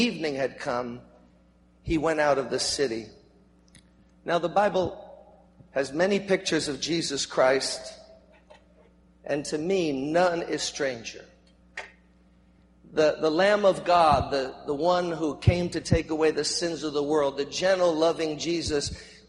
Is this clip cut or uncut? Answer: uncut